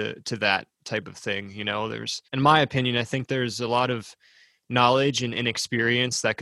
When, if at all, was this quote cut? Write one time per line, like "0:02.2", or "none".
0:02.3